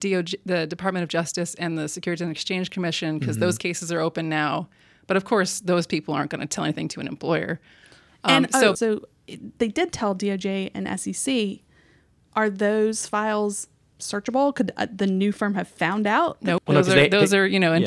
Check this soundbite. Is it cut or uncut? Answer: cut